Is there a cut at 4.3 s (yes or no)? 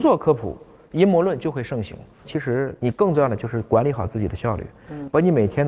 no